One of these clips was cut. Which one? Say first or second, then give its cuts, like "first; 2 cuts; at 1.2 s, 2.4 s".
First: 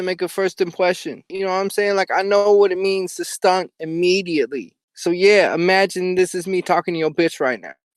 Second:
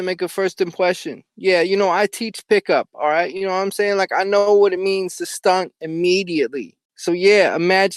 first; 1 cut; at 1.3 s